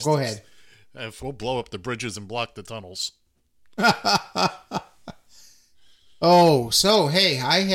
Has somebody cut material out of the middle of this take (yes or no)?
yes